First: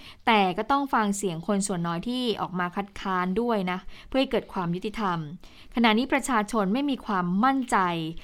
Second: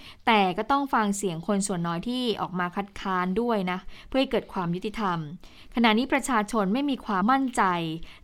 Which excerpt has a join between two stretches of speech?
second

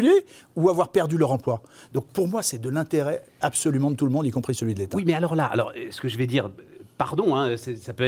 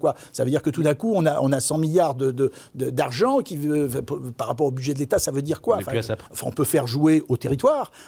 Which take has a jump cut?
second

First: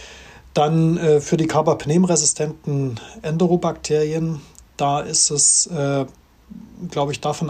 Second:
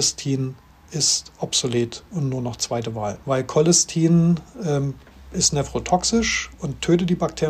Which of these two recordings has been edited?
second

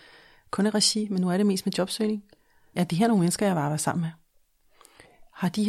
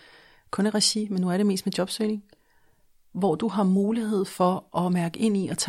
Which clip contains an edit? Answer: first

